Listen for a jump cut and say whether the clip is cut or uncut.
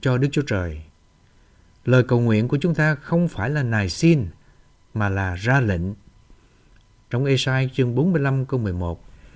uncut